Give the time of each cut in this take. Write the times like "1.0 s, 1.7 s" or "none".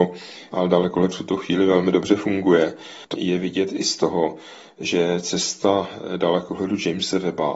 3.1 s